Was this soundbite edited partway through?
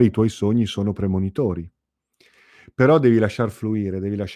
no; 0 cuts

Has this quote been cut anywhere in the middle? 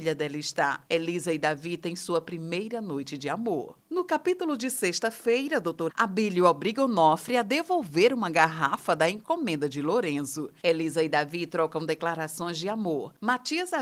yes; 2 cuts; at 5.9 s, 10.6 s

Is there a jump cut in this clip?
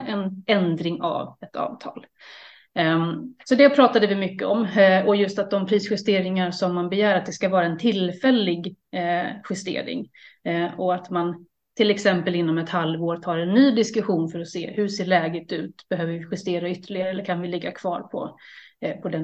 no; 0 cuts

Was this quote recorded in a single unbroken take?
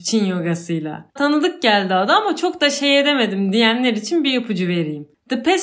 no; 1 cut; at 1.2 s

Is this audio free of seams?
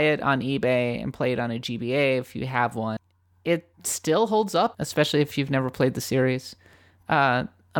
no; 2 cuts; at 3.7 s, 4.7 s

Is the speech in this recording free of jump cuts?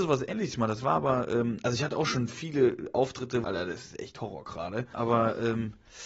no; 2 cuts; at 3.4 s, 4.9 s

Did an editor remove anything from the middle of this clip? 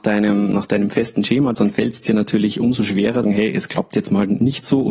yes; 2 cuts; at 1.5 s, 3.2 s

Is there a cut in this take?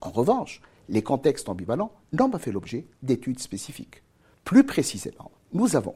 yes; 1 cut; at 4.3 s

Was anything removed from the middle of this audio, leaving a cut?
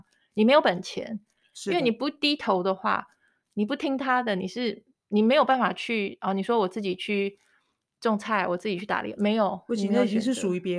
no; 0 cuts

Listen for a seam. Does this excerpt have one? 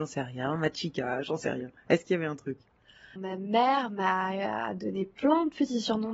yes; 1 cut; at 3.2 s

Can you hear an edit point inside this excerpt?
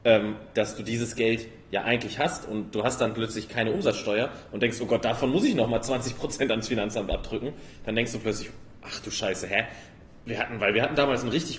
no; 0 cuts

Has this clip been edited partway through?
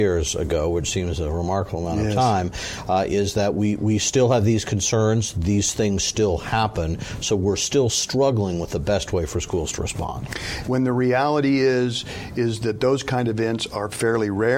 yes; 1 cut; at 10.6 s

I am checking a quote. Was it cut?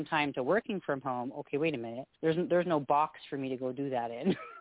yes; 1 cut; at 2.1 s

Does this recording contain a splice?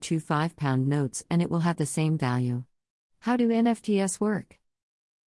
yes; 1 cut; at 3.1 s

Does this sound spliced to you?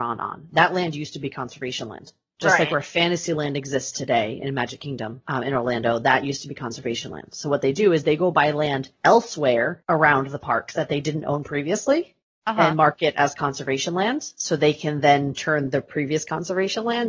no; 0 cuts

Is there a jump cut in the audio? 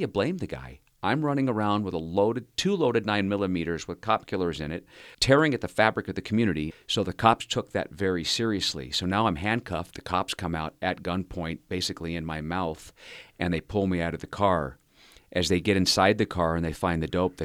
yes; 3 cuts; at 5.1 s, 6.7 s, 9.9 s

